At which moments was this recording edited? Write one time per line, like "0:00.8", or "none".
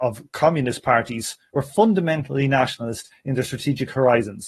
0:01.5